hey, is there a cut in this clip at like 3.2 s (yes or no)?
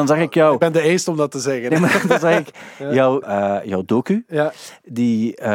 yes